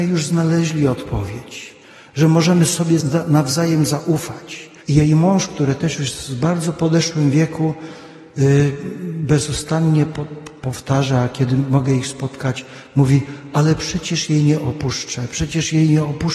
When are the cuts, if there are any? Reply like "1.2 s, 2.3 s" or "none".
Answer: 3.0 s, 4.8 s, 13.5 s

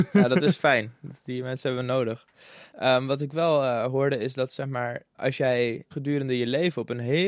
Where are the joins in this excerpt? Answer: 2.7 s

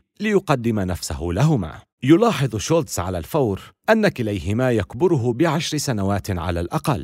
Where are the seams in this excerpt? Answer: 1.9 s

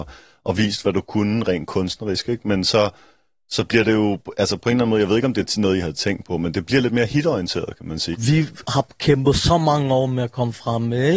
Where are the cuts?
8.1 s

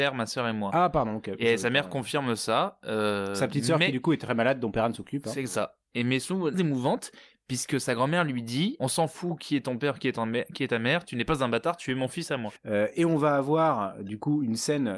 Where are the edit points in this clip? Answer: 6.5 s, 12.6 s

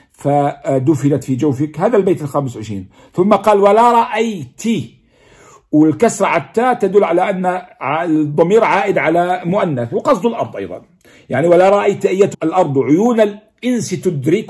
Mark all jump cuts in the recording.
12.3 s

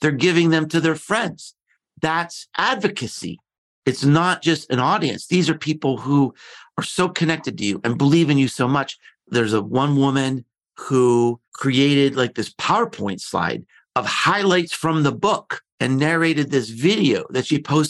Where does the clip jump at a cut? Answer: 9.2 s, 11.4 s, 15.7 s

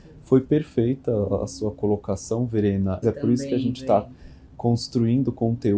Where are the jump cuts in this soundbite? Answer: 3.0 s

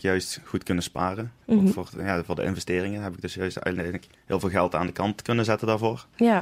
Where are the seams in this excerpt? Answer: 1.4 s

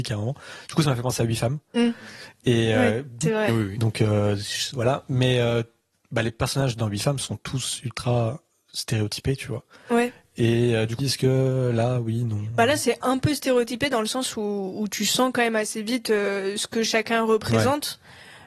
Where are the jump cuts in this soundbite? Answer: 3.2 s, 11.0 s

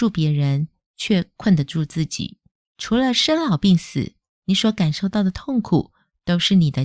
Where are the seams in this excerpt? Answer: 2.7 s

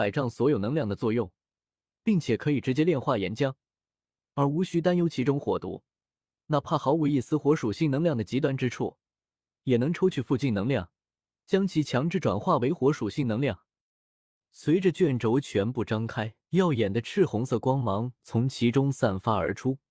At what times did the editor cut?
14.4 s, 16.4 s

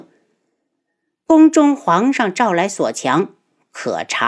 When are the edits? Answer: none

